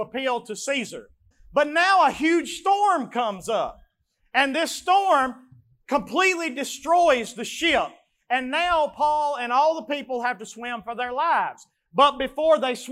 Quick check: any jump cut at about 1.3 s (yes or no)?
yes